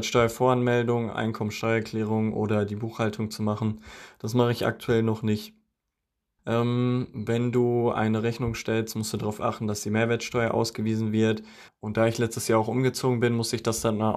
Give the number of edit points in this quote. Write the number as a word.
two